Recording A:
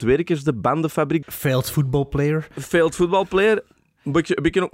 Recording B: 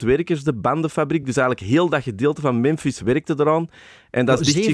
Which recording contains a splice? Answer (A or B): A